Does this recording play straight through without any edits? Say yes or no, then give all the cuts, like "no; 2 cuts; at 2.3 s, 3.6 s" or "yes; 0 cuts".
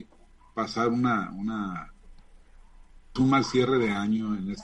no; 1 cut; at 3.2 s